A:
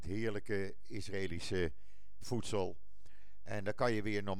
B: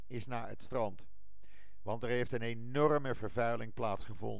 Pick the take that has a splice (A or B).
A